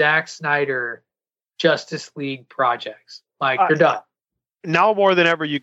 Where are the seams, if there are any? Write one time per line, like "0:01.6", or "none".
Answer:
none